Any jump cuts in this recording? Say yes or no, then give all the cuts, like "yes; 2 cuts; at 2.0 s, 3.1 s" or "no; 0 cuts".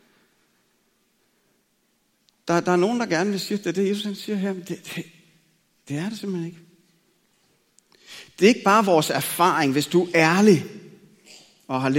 no; 0 cuts